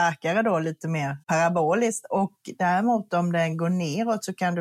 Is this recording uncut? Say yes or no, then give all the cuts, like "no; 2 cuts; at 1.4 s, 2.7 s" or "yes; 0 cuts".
no; 1 cut; at 1.2 s